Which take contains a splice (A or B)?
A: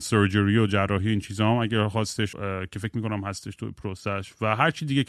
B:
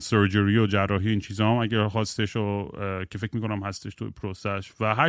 A